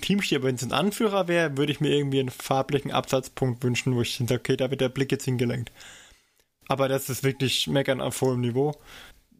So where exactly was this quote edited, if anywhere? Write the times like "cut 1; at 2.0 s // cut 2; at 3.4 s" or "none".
none